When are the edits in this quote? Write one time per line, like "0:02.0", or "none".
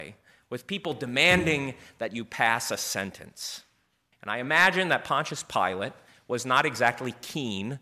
0:04.1